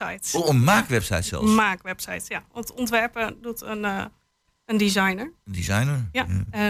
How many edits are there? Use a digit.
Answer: 0